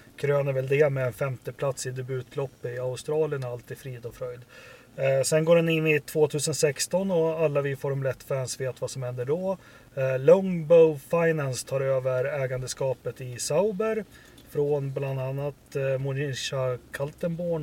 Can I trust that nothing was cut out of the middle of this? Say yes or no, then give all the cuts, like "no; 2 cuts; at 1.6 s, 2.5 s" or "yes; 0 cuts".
yes; 0 cuts